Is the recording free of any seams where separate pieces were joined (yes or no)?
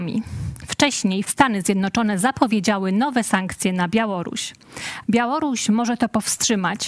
no